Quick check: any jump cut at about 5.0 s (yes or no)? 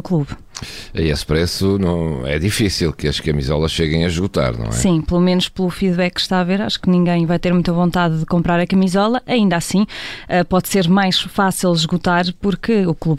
no